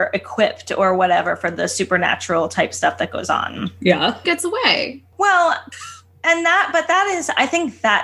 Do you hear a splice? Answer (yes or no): yes